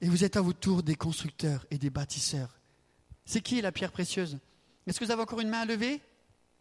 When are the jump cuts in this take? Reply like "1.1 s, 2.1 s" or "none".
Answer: 3.2 s